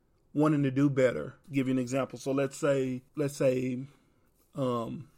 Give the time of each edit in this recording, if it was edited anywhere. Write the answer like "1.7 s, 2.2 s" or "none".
1.4 s, 3.1 s